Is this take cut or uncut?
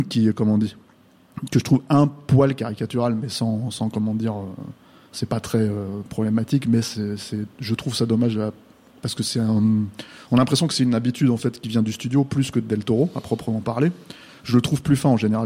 uncut